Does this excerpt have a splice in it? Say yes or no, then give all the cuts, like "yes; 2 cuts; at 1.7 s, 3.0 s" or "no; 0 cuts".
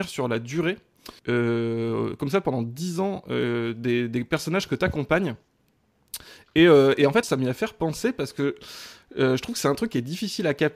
yes; 2 cuts; at 1.2 s, 7.2 s